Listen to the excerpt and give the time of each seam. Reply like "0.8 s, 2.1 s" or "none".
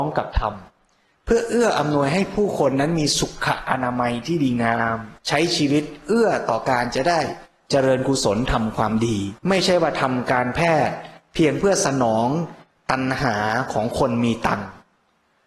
5.2 s, 9.4 s